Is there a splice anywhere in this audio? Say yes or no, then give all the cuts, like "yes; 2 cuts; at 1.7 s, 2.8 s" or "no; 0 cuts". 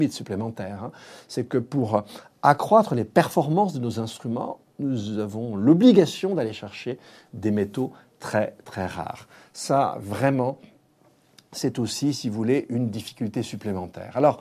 no; 0 cuts